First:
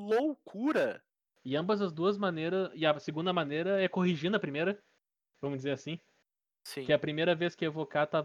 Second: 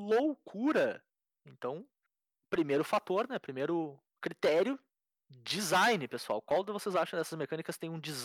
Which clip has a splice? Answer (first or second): first